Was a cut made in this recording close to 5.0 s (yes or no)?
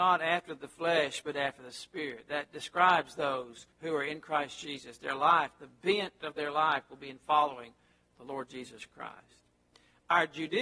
no